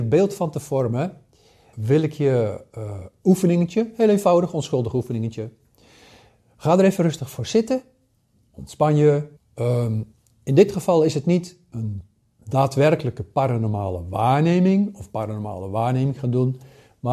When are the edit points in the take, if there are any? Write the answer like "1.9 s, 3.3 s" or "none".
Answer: 1.7 s, 3.2 s, 9.4 s